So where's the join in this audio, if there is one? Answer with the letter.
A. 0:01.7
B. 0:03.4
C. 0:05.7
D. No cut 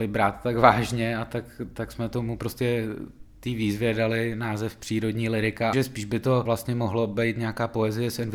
C